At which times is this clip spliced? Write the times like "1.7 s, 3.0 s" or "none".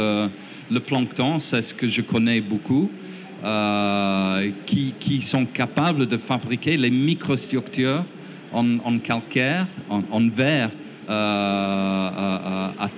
9.9 s, 11.1 s